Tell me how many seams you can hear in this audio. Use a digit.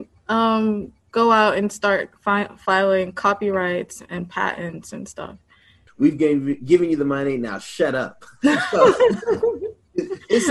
1